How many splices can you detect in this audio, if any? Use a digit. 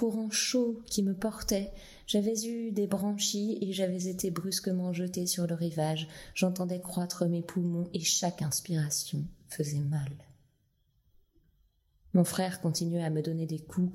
0